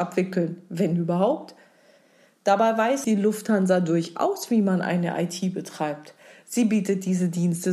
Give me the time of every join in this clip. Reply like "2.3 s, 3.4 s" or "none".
3.0 s